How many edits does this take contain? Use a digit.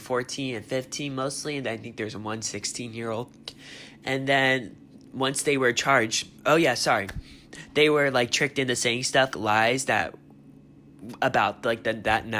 2